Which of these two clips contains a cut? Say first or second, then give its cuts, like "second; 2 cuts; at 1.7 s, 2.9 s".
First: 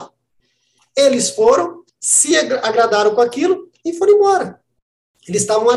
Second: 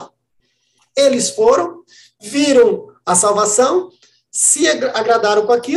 first; 1 cut; at 1.9 s